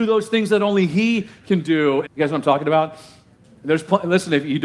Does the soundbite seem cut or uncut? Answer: cut